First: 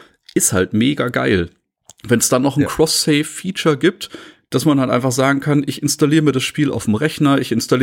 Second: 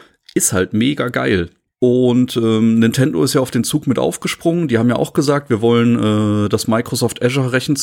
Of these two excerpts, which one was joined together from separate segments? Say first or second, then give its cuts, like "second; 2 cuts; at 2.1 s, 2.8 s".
second; 1 cut; at 1.7 s